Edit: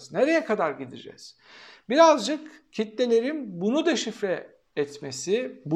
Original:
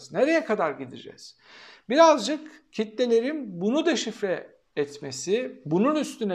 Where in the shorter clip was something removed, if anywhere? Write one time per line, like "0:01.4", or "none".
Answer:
none